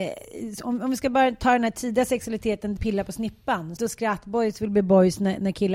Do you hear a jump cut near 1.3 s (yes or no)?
no